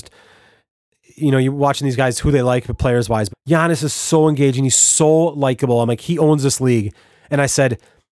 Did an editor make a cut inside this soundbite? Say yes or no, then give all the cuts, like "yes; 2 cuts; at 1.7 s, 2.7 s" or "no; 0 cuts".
yes; 1 cut; at 3.3 s